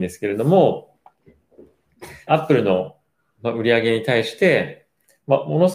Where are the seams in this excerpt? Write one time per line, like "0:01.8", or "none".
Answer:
0:02.3